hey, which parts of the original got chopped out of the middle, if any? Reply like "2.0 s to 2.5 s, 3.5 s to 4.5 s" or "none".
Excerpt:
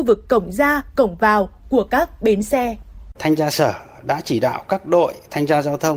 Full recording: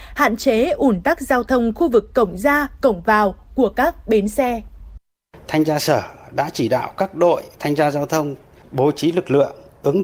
5.0 s to 5.4 s